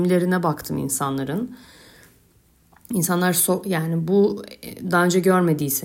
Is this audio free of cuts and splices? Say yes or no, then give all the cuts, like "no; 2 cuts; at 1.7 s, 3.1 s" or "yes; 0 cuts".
yes; 0 cuts